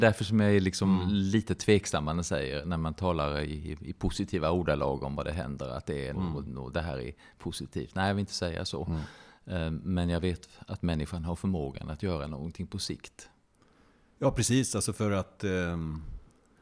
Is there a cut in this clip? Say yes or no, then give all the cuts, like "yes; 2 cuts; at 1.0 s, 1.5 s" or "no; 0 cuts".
yes; 1 cut; at 6.1 s